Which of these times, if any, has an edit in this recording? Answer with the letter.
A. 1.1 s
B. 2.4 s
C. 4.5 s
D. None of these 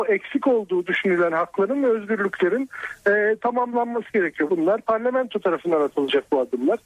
C